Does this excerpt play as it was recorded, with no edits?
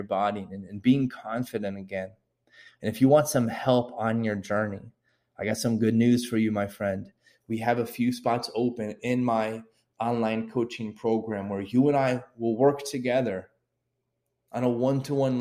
yes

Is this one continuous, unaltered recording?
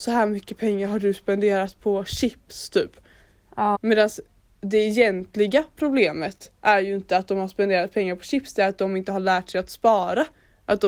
no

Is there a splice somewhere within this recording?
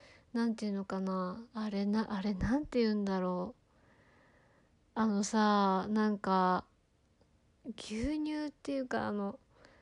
yes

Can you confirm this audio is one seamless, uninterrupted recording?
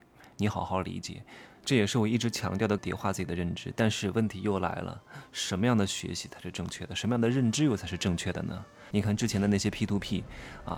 no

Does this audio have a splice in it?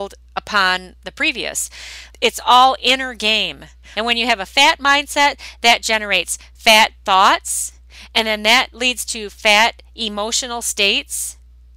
yes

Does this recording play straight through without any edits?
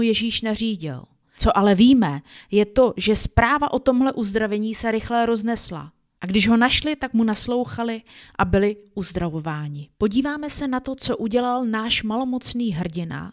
no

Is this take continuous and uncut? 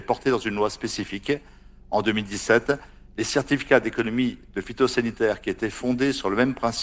yes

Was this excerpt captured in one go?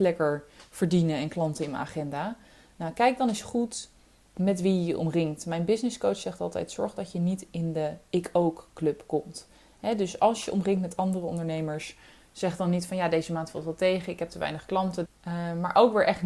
no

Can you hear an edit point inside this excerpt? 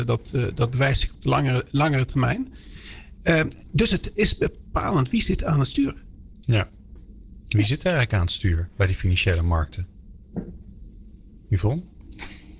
no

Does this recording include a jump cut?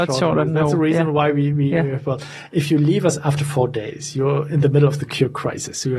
no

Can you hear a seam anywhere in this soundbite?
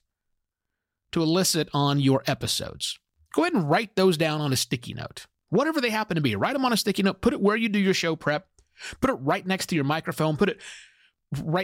no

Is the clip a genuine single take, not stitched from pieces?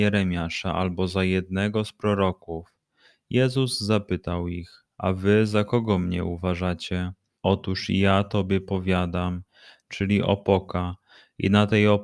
no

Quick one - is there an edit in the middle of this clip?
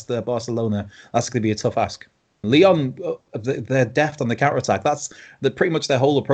yes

